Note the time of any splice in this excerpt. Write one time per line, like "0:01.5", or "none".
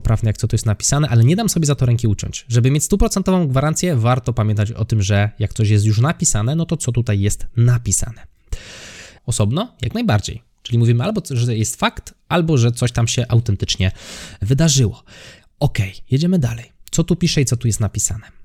0:09.2